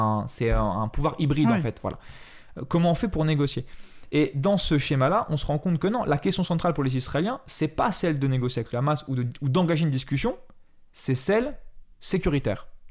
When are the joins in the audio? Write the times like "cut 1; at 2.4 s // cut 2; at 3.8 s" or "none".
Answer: none